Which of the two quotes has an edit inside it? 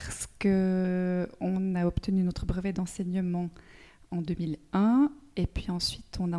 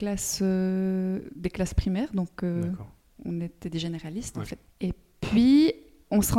second; 1 cut; at 4.6 s

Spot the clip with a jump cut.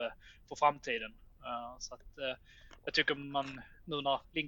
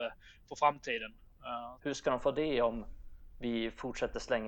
second; 1 cut; at 1.8 s

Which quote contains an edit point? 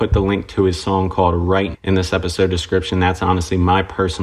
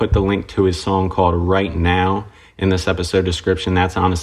first; 1 cut; at 1.7 s

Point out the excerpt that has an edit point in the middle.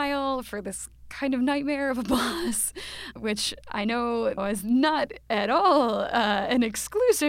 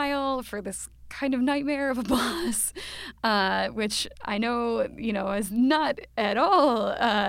first; 2 cuts; at 3.2 s, 4.4 s

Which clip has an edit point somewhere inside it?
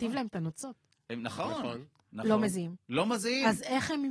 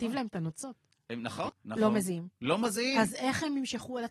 second; 1 cut; at 1.5 s

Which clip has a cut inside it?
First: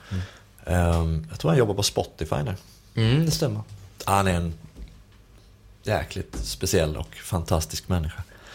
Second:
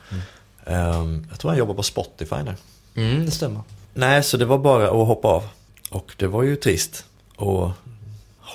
second; 1 cut; at 3.8 s

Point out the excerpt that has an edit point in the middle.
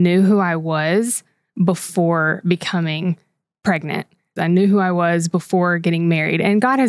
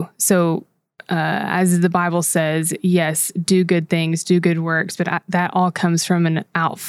first; 1 cut; at 4.4 s

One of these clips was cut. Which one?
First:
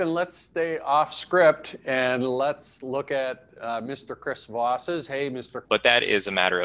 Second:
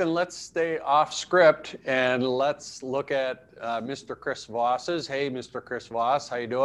first; 1 cut; at 5.6 s

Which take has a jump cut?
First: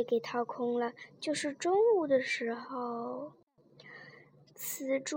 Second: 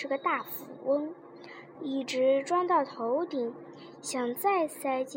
second; 1 cut; at 1.7 s

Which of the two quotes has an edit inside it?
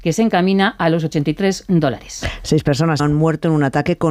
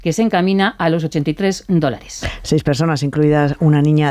first; 1 cut; at 3.0 s

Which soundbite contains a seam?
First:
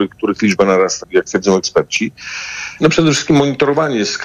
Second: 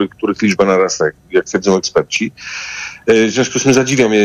first; 2 cuts; at 1.0 s, 2.8 s

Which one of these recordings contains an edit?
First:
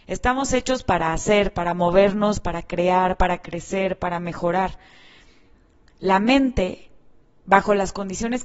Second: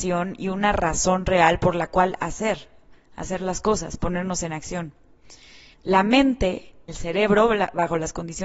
second; 2 cuts; at 5.7 s, 6.9 s

